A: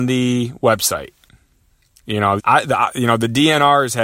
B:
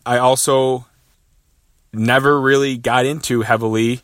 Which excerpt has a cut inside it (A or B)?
A